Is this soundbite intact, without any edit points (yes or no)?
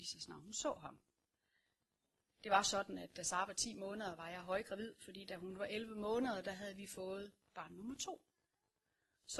yes